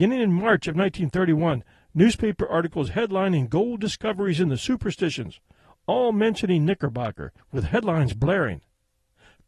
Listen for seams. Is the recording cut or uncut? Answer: cut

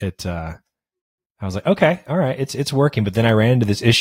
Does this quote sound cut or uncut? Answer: uncut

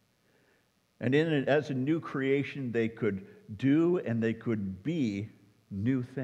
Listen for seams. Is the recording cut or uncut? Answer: uncut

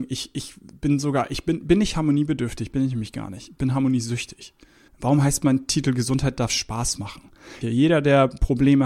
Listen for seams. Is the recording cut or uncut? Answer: cut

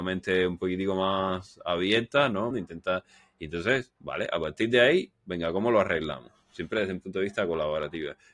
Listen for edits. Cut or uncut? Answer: cut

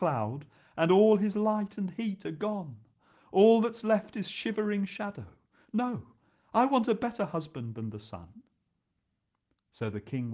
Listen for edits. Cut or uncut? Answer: uncut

